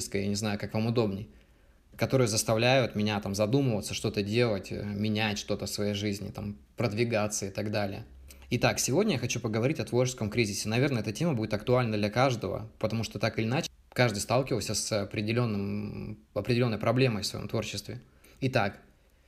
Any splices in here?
no; 0 cuts

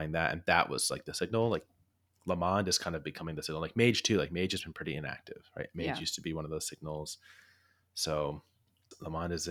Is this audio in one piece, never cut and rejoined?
yes; 0 cuts

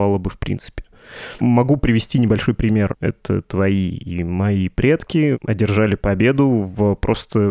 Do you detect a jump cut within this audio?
yes; 2 cuts; at 1.4 s, 3.0 s

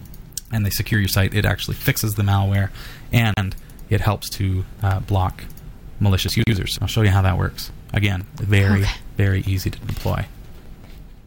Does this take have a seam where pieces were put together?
yes; 1 cut; at 6.7 s

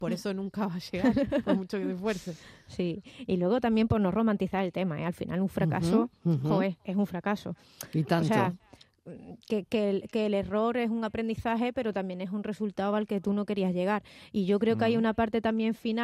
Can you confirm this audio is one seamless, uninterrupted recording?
yes; 0 cuts

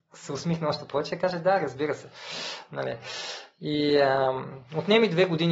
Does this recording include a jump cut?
no; 0 cuts

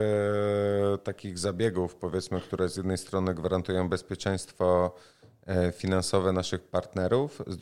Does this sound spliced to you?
no; 0 cuts

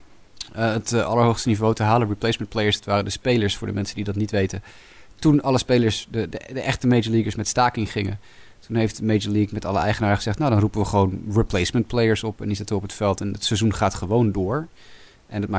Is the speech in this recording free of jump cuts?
yes; 0 cuts

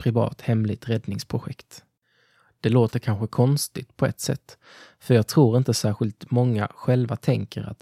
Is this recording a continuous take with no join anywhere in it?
yes; 0 cuts

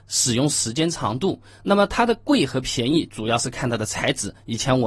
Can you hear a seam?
no; 0 cuts

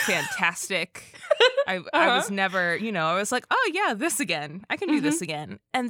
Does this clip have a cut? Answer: no; 0 cuts

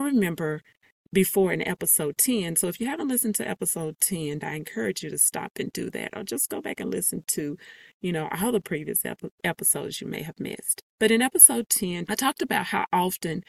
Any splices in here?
yes; 3 cuts; at 4.4 s, 10.9 s, 12.1 s

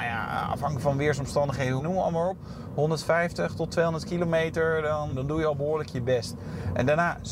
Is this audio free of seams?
no; 2 cuts; at 1.8 s, 5.1 s

